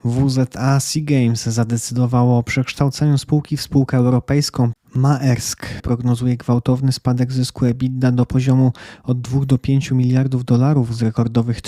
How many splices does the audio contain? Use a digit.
2